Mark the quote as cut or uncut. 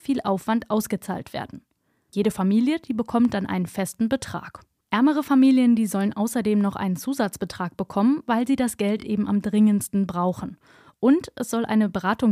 uncut